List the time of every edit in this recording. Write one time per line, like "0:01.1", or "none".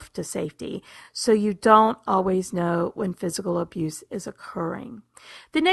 none